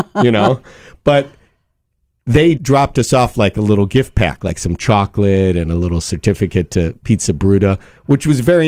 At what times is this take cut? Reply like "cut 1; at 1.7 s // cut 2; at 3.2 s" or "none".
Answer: cut 1; at 2.5 s